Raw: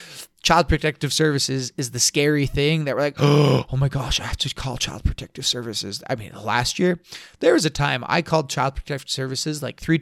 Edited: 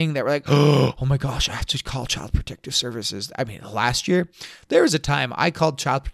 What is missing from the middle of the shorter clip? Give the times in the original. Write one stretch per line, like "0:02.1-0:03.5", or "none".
none